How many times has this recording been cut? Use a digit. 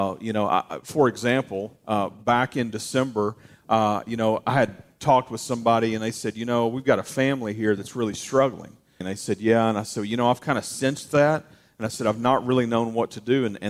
1